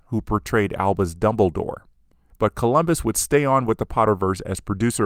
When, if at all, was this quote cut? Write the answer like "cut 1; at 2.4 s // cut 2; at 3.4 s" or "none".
cut 1; at 2.3 s